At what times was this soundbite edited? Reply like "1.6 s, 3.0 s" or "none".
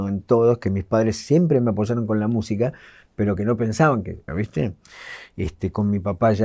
4.3 s